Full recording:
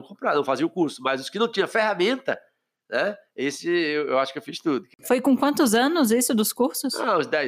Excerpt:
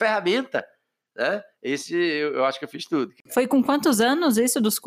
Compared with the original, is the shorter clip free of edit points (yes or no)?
yes